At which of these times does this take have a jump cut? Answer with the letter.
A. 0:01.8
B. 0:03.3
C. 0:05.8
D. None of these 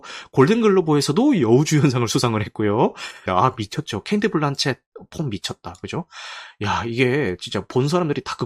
B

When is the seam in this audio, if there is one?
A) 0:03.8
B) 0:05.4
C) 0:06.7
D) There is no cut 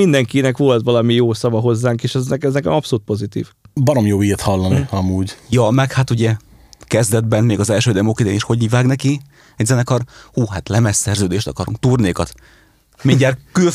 A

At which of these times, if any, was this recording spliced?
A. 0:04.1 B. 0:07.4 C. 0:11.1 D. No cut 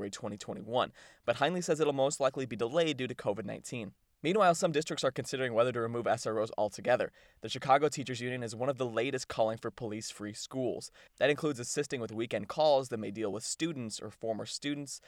C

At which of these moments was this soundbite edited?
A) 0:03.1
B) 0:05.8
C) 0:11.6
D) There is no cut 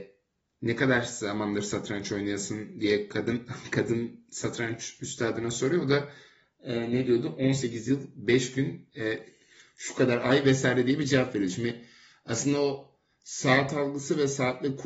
D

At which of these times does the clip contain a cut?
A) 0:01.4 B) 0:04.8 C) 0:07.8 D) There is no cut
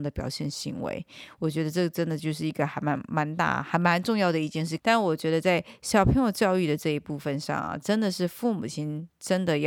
B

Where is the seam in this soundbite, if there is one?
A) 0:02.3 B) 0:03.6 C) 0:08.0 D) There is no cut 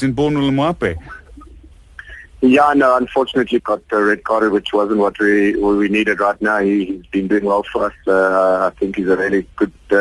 B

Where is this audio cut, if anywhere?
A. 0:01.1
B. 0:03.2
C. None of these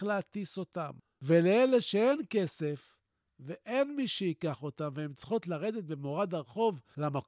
C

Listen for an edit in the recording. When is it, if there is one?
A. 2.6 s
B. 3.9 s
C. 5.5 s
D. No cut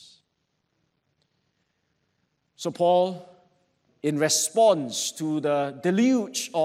B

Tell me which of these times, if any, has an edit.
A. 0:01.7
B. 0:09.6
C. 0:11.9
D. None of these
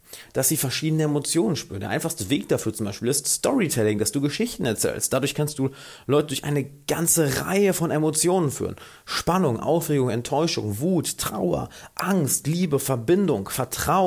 D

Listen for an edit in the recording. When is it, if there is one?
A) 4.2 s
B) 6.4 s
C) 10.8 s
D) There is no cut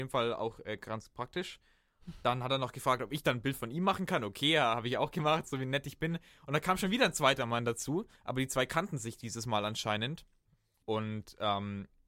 C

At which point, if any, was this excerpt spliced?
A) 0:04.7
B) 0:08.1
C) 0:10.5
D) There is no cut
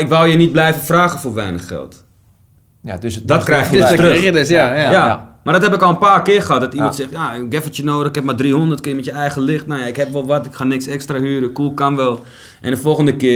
D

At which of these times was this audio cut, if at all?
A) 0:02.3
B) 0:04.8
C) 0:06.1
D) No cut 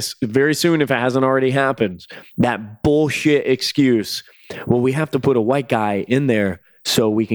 D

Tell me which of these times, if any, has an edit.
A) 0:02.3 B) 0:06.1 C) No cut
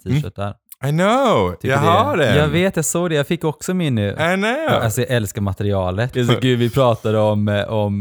B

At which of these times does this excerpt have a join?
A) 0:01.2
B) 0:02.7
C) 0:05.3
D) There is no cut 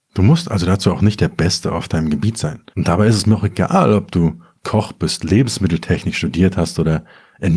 B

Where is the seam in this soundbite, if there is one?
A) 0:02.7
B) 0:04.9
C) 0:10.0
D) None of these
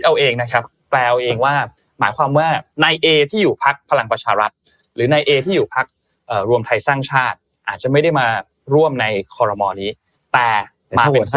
A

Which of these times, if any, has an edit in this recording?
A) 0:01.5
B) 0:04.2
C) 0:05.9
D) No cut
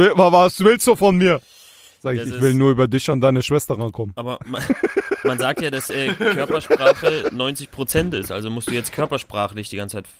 D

